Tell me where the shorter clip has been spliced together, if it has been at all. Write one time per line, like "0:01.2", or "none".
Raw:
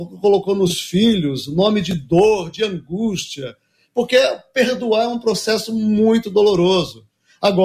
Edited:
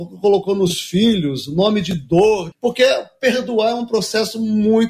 0:02.5

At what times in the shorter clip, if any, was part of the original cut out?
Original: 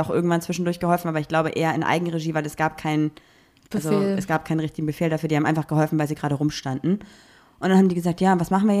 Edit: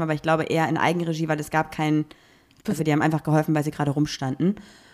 0:02.8

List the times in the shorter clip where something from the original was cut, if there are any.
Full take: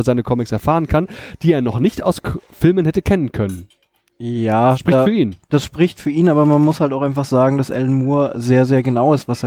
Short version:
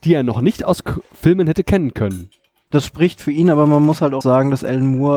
0:02.7
0:04.2

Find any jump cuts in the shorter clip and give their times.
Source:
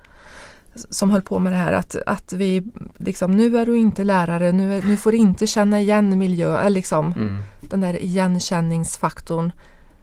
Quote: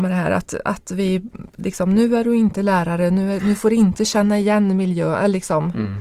none

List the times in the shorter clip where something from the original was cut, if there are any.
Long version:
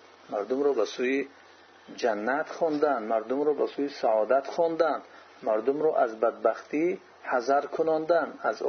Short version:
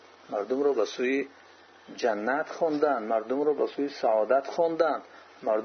none

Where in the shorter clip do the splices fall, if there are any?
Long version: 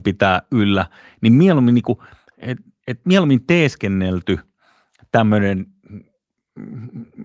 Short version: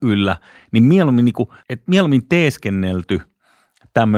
0:01.6

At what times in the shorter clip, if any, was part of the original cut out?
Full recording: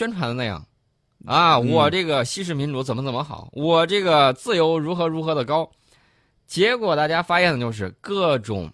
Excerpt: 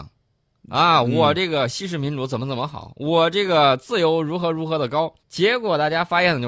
0:05.2

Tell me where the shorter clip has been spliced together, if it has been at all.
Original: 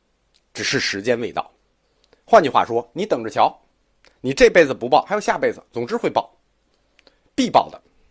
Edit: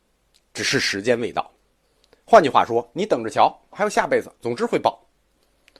0:03.7

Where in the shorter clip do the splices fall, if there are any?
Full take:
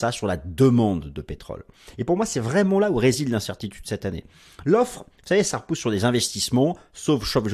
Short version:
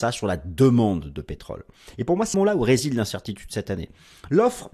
0:02.3

